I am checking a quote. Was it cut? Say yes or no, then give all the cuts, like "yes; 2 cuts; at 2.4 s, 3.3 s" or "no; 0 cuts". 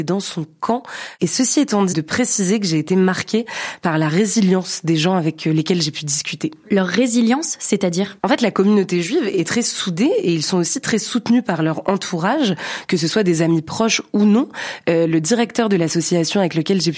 yes; 1 cut; at 1.9 s